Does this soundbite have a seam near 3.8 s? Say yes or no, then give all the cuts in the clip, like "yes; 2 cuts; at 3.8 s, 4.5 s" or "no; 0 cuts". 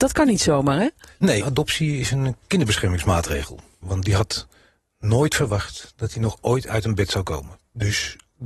yes; 2 cuts; at 1.4 s, 3.8 s